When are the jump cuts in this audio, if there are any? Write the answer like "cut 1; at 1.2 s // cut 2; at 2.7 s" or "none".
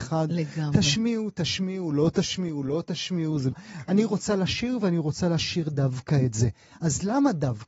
cut 1; at 3.5 s